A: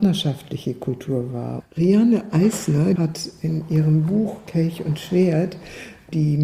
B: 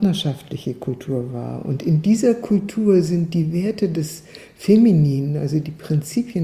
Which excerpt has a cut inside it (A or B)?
A